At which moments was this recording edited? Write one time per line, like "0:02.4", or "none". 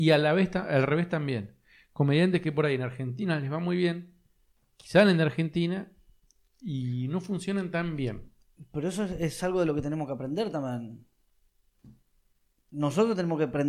none

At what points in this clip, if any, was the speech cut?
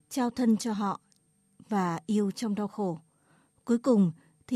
none

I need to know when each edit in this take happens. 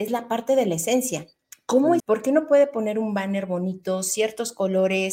0:02.0

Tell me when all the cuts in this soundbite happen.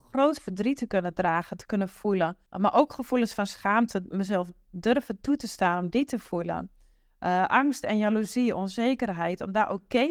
0:02.5

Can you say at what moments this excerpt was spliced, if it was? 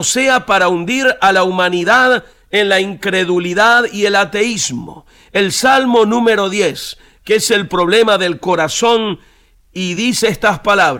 0:07.2

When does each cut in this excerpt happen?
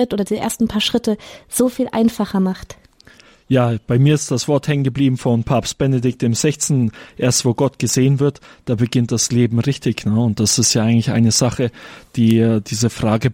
none

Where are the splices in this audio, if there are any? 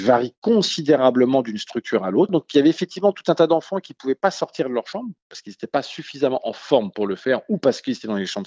none

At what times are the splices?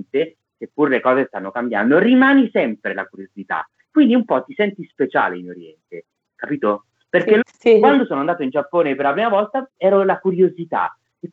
0:07.4
0:09.8

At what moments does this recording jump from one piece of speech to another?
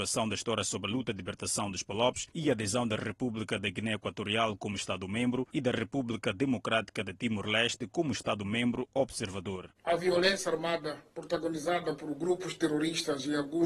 0:09.7

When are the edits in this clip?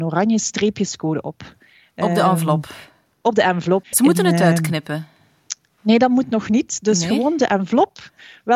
0:03.9

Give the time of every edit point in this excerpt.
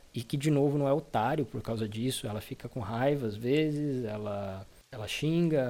none

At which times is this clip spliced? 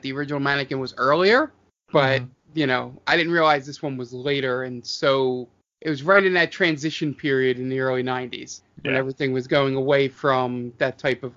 none

